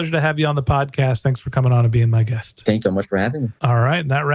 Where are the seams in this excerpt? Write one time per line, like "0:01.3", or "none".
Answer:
0:02.8